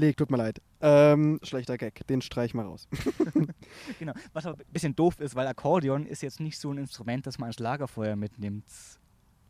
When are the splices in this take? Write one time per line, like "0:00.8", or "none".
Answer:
none